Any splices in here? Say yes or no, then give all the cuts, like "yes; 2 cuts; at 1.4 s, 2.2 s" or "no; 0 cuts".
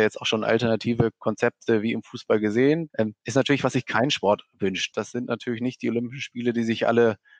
yes; 2 cuts; at 2.9 s, 4.9 s